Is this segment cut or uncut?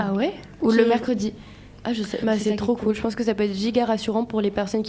cut